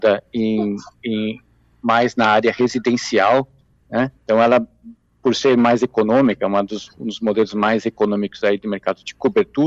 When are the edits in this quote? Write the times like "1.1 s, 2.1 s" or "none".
4.2 s